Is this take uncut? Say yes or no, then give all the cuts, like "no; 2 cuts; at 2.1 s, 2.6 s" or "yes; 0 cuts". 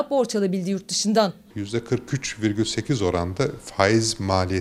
yes; 0 cuts